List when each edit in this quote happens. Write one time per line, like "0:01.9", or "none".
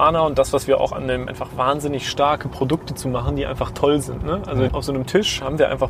0:01.3
0:04.7